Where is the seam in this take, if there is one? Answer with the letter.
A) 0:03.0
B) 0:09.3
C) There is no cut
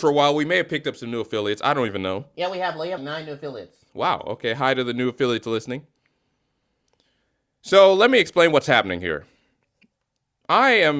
A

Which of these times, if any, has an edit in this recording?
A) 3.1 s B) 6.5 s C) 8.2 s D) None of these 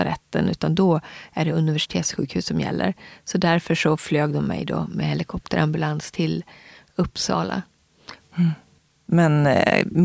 C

